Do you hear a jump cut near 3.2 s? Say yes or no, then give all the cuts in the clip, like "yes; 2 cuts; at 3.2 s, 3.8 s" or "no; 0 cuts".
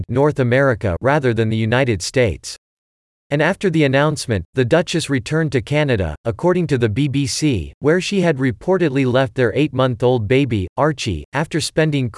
yes; 1 cut; at 3.2 s